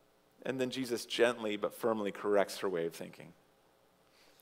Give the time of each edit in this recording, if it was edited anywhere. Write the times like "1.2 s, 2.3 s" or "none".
none